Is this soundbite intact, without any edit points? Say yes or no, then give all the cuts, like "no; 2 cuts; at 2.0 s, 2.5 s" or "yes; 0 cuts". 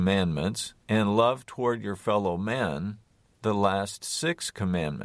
yes; 0 cuts